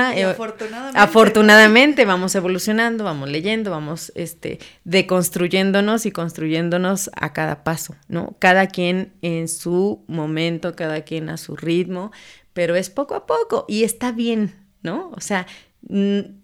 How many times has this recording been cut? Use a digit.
0